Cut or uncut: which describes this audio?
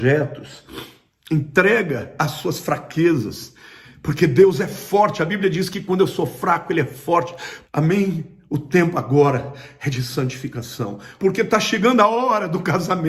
cut